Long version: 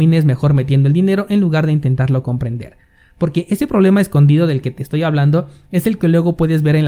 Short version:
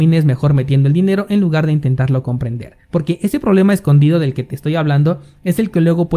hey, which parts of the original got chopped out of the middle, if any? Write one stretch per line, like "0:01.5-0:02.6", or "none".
0:02.8-0:03.1